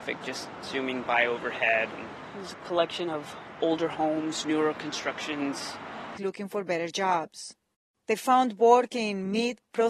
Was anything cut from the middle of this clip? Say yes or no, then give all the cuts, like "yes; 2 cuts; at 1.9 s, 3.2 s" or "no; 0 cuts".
yes; 1 cut; at 6.2 s